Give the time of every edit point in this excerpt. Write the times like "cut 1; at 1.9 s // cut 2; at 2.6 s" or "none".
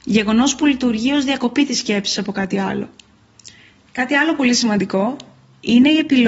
cut 1; at 3.9 s